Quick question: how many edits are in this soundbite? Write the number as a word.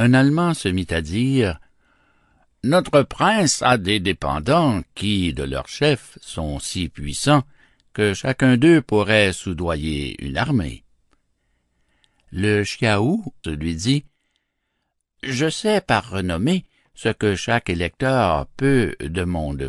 one